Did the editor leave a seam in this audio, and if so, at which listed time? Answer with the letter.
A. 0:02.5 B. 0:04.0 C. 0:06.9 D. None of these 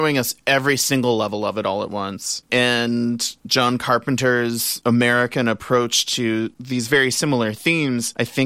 A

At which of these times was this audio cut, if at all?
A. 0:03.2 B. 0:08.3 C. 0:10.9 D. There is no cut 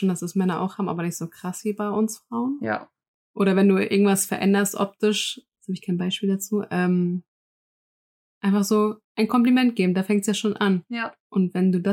A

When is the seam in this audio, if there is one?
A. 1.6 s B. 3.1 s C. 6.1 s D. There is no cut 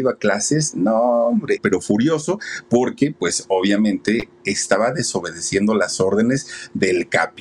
A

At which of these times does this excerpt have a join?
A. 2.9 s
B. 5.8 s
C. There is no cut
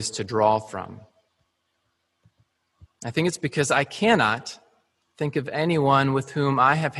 A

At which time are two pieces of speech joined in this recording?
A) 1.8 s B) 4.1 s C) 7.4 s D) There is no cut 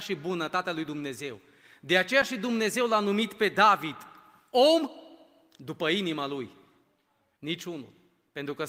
C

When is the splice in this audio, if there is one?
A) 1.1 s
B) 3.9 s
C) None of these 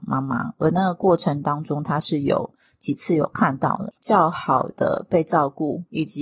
B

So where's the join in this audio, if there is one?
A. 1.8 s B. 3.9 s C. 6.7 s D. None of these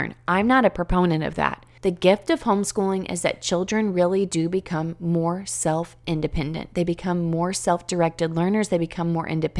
A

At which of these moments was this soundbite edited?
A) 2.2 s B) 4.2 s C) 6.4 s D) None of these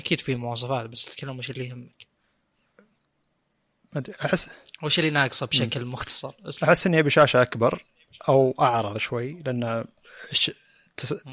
B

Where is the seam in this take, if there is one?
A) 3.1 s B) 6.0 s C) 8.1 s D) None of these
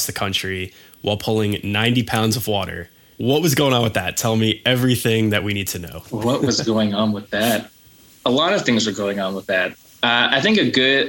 A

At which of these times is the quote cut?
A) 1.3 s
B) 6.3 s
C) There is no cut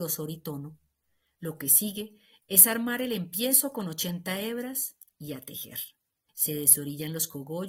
B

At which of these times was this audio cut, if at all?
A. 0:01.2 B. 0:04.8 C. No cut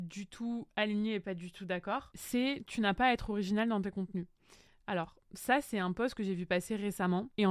C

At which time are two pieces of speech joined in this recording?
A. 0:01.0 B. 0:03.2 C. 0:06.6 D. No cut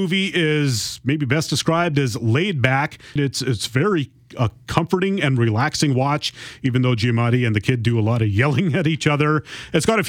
B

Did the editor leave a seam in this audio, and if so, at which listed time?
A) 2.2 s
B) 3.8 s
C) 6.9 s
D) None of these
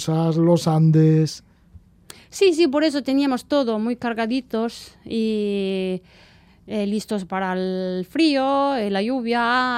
D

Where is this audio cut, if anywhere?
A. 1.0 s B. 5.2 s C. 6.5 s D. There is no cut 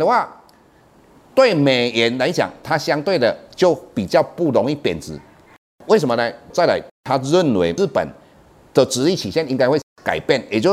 C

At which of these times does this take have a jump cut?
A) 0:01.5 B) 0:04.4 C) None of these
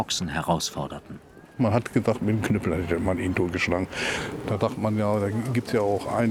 C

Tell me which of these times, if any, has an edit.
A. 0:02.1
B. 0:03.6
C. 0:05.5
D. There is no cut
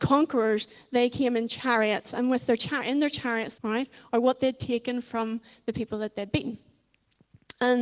B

